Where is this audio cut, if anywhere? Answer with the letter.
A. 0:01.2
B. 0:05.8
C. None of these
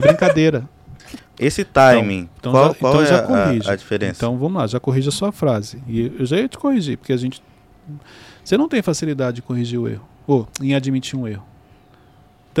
A